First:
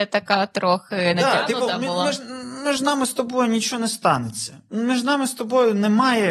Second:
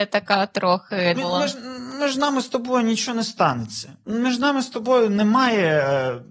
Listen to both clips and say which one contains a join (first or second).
second